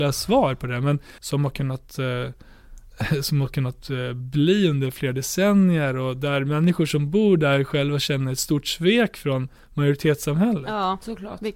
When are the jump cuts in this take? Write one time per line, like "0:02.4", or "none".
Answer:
0:01.2